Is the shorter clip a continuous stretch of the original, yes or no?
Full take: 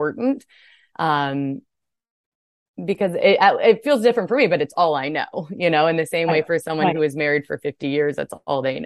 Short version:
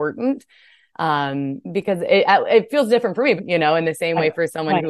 no